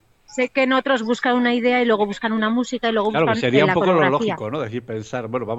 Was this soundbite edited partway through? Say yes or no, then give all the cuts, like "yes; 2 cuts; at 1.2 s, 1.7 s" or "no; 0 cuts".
no; 0 cuts